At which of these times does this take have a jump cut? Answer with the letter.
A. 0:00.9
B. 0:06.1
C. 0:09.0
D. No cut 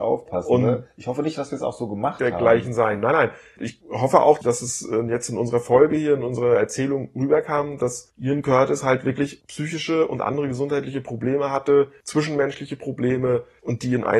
D